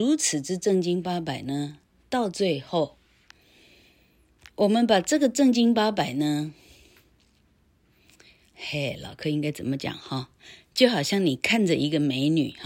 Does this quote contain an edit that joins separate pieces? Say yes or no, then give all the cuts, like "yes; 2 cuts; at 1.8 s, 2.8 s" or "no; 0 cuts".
no; 0 cuts